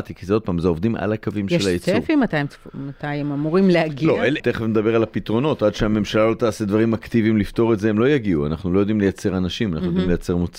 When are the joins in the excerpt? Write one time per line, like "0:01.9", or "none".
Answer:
0:04.4